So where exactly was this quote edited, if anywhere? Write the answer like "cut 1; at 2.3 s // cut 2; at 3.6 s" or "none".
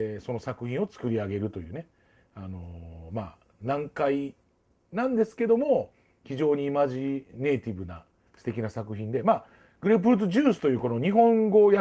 none